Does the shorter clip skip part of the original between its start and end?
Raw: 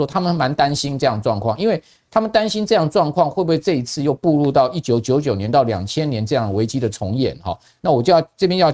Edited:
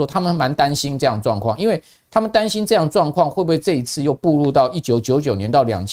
no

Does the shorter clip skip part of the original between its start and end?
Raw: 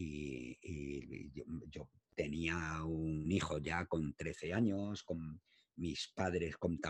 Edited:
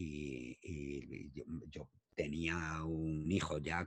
no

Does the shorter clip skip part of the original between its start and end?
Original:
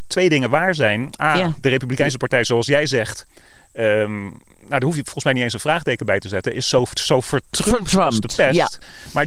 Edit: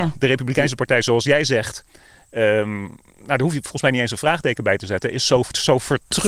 no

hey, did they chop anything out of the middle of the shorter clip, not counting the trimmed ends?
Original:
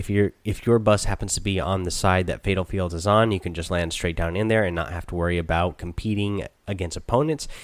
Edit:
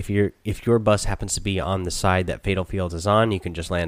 no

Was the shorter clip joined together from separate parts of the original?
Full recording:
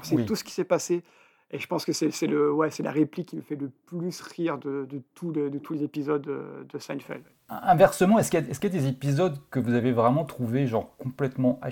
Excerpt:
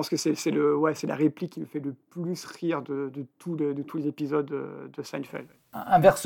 no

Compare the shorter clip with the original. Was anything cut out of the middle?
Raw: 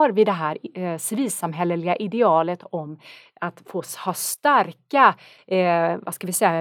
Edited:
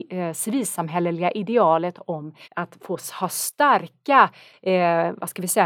yes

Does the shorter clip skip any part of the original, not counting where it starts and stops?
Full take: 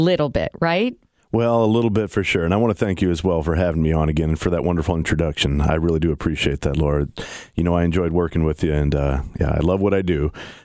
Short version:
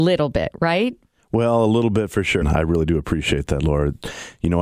yes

